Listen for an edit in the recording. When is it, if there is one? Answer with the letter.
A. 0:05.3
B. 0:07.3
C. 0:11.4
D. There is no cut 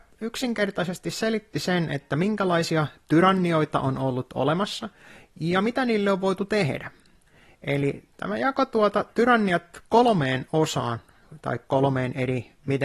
D